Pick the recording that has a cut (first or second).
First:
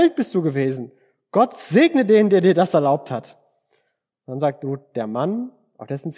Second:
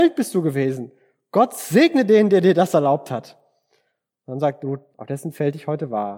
second